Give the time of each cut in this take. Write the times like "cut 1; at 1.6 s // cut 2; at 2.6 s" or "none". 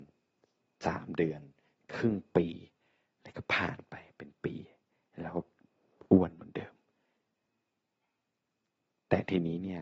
none